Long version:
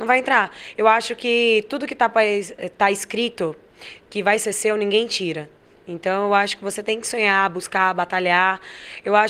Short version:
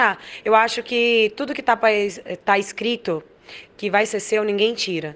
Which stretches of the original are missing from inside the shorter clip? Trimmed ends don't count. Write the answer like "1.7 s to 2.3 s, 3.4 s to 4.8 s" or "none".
none